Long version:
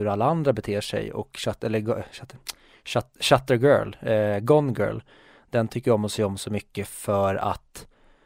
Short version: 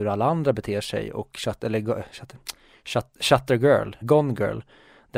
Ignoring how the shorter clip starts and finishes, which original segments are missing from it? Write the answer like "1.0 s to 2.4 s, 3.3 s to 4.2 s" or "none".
4.0 s to 4.4 s